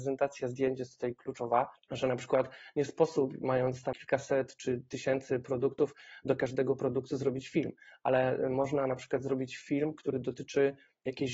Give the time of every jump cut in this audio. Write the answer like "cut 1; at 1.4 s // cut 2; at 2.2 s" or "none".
cut 1; at 1.8 s // cut 2; at 3.9 s